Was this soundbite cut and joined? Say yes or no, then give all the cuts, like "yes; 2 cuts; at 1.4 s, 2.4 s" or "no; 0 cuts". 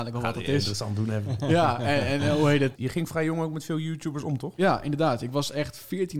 yes; 1 cut; at 2.7 s